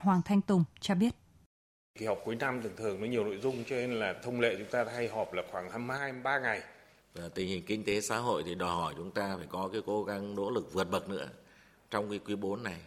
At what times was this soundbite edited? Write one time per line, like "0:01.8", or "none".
0:07.0

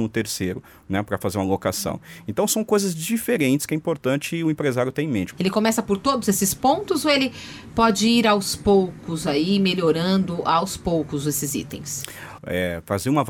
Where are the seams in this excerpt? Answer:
0:05.3
0:12.4

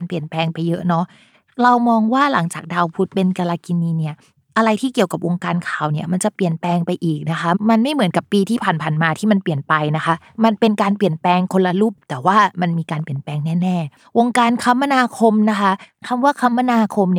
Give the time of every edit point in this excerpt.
0:12.0

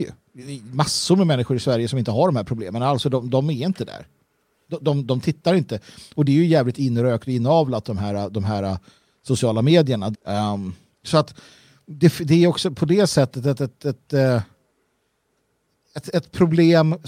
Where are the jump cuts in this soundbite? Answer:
0:10.1

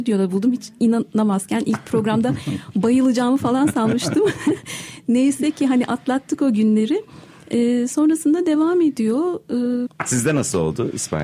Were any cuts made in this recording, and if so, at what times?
0:09.9

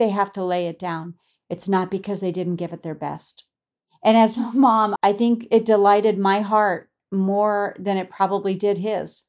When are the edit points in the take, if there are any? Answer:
0:03.9
0:05.0

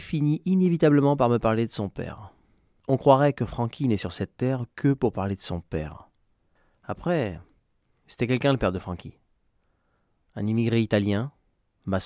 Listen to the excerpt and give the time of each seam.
none

